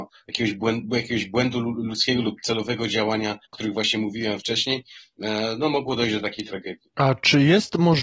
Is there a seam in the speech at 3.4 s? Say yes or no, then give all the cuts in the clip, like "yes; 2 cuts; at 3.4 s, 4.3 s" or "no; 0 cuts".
yes; 1 cut; at 3.4 s